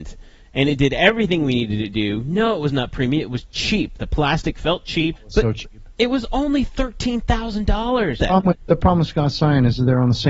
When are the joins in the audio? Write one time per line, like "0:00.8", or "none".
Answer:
0:05.2
0:08.2